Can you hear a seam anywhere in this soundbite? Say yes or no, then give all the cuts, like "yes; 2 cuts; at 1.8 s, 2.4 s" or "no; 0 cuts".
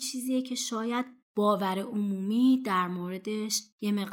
no; 0 cuts